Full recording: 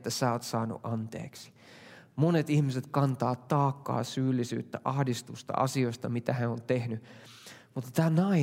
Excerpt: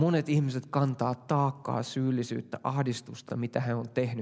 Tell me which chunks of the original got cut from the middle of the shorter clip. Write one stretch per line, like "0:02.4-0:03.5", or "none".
0:05.5-0:06.0